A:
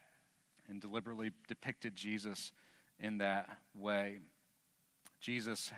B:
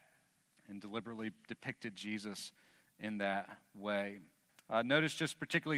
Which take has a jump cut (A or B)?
B